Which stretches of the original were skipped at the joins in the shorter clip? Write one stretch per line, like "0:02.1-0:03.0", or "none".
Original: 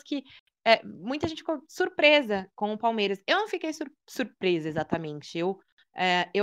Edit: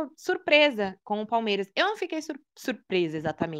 none